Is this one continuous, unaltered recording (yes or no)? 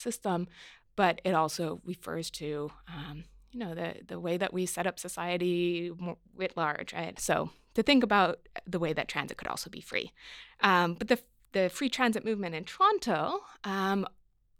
no